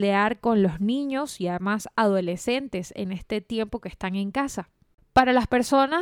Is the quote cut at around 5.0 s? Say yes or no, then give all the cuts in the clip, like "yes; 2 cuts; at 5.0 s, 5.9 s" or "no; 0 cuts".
yes; 1 cut; at 5.0 s